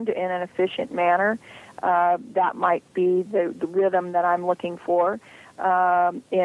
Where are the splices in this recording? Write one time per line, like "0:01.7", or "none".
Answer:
none